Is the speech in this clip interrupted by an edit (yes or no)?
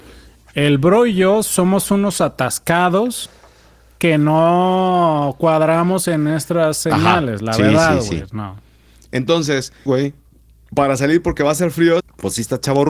yes